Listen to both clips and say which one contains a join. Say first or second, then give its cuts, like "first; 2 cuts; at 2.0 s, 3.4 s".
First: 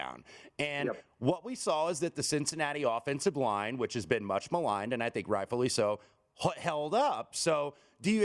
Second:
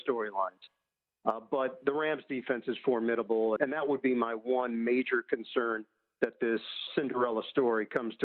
second; 2 cuts; at 3.6 s, 6.9 s